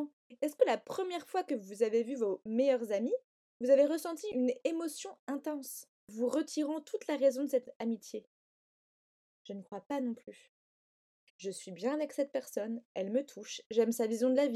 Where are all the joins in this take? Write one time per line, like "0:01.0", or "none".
0:06.0
0:11.3